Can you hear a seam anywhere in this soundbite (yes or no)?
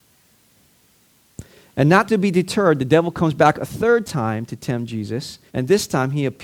yes